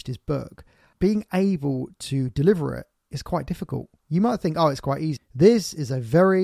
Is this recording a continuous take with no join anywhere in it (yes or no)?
no